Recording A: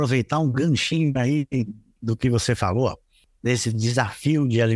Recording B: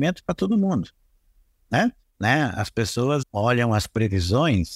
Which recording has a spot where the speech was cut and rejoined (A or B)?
B